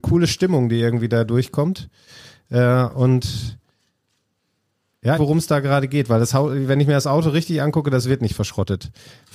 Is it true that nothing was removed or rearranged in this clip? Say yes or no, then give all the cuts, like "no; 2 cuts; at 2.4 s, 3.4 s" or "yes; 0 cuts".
no; 1 cut; at 5.2 s